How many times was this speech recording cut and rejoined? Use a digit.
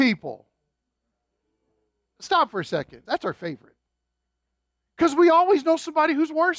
1